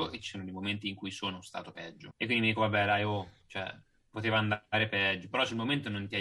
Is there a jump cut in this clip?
no; 0 cuts

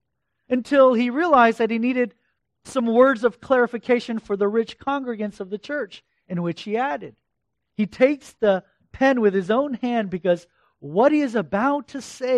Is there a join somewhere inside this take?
yes; 1 cut; at 7.5 s

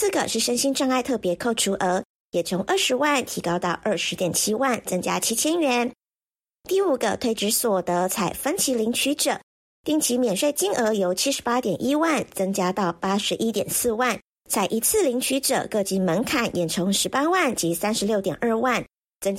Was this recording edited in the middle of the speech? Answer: yes; 1 cut; at 14.3 s

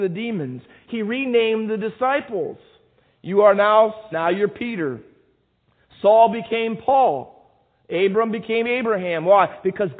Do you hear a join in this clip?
yes; 1 cut; at 4.1 s

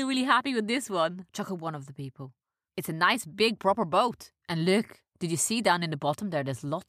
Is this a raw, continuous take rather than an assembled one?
yes; 0 cuts

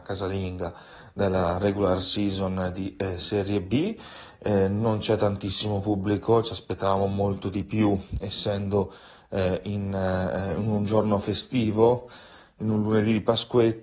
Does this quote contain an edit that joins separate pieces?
no; 0 cuts

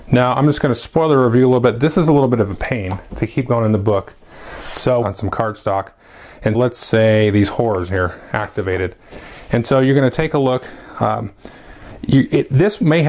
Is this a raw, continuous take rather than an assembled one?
no; 2 cuts; at 5.0 s, 6.5 s

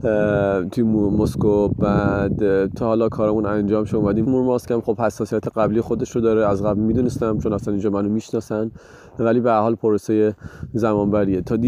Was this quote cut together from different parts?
yes; 1 cut; at 4.2 s

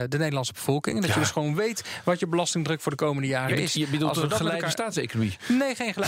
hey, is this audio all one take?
yes; 0 cuts

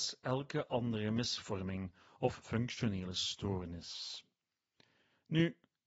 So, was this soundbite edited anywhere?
no; 0 cuts

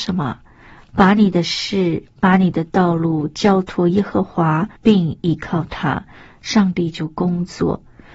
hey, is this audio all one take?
no; 1 cut; at 4.8 s

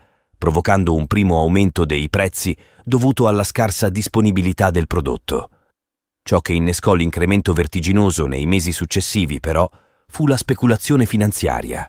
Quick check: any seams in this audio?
no; 0 cuts

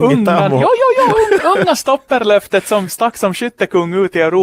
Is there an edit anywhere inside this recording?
no; 0 cuts

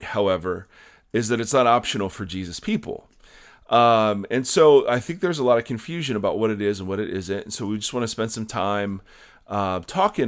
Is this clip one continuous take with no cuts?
yes; 0 cuts

